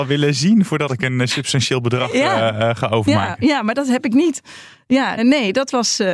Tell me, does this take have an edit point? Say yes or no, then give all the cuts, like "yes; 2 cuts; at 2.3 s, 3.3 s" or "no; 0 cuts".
yes; 1 cut; at 5.2 s